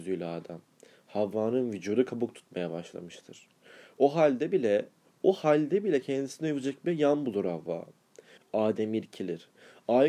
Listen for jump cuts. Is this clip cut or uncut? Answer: cut